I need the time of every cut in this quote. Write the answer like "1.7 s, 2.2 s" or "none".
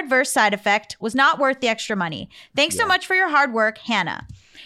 1.0 s